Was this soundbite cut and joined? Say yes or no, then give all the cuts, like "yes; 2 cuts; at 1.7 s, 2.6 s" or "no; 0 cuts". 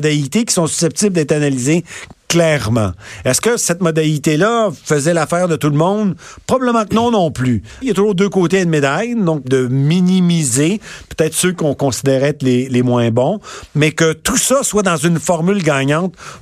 yes; 2 cuts; at 7.8 s, 9.4 s